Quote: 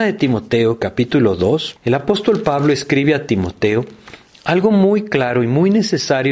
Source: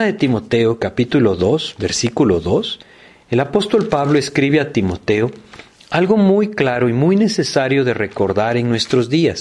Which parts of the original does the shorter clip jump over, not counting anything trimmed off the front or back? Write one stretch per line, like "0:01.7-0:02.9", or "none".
0:01.8-0:03.2